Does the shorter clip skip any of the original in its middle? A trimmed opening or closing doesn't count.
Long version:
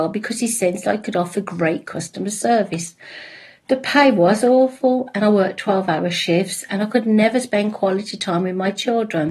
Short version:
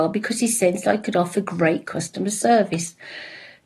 no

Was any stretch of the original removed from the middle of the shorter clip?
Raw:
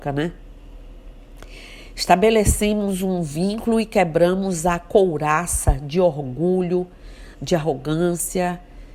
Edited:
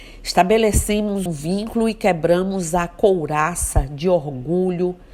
yes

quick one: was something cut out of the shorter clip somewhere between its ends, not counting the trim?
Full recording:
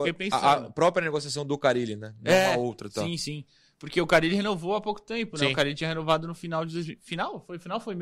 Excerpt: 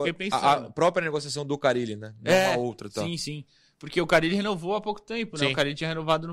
no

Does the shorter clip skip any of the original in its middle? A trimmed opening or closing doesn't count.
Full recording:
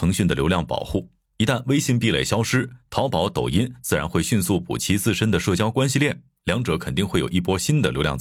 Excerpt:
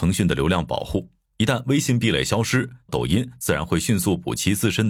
yes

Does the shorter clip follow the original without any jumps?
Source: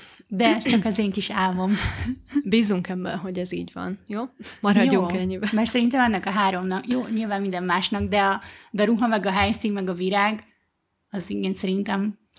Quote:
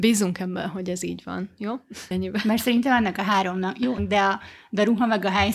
no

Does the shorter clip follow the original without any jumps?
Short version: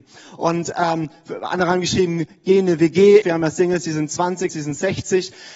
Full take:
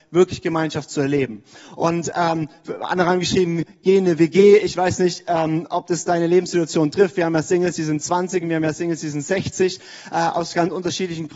no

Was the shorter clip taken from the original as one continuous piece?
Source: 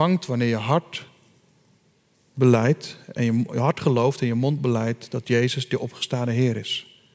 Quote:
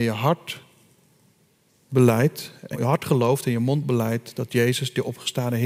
no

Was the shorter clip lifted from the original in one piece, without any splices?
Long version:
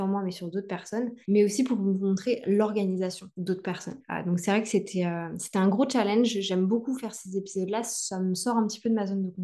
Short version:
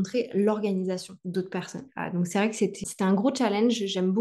no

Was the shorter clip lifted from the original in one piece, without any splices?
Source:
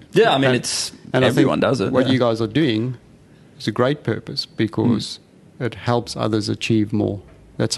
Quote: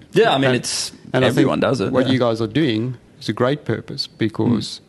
no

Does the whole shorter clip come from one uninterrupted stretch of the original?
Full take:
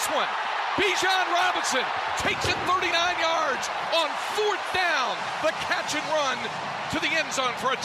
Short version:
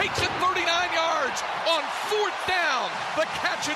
yes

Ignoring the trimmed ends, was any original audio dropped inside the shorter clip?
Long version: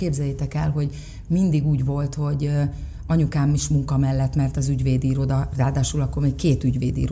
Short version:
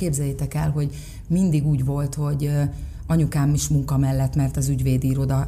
no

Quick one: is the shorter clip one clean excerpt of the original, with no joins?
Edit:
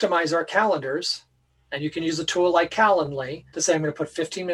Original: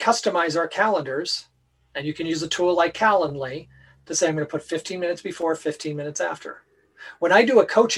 no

